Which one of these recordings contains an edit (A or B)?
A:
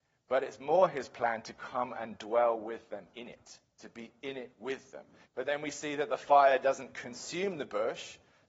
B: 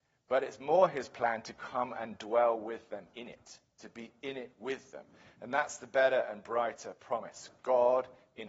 A